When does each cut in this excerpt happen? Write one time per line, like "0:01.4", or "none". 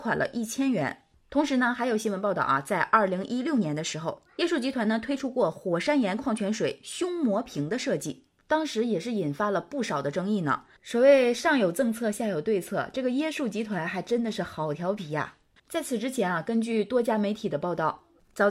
0:10.8
0:15.6